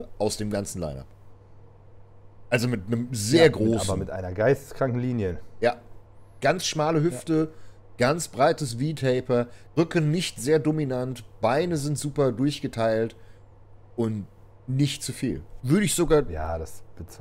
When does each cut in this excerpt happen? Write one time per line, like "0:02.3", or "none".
0:09.7
0:15.6